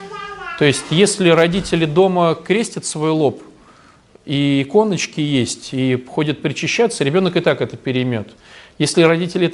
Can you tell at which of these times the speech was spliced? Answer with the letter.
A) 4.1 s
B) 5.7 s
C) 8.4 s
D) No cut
D